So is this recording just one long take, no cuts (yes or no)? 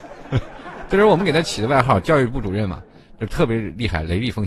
yes